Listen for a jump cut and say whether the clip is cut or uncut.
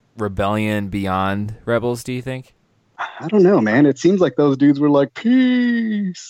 uncut